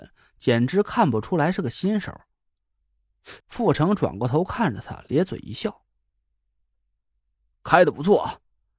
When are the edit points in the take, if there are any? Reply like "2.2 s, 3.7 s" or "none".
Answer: 3.4 s